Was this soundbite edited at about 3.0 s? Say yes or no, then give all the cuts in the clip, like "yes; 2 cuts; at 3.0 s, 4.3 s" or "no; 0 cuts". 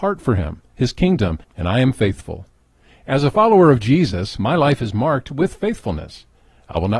no; 1 cut; at 1.4 s